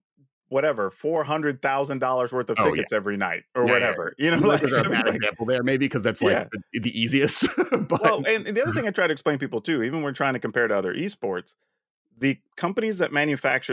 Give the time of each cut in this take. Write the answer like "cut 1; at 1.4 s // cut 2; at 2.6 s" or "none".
none